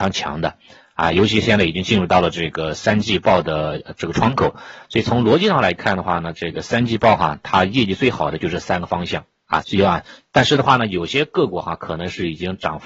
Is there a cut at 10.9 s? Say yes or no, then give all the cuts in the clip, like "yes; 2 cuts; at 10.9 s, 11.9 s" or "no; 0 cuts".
no; 1 cut; at 9.6 s